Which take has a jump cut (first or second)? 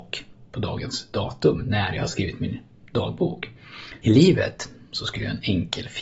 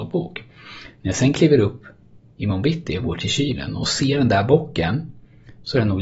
first